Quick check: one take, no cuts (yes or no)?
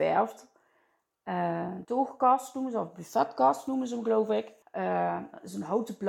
no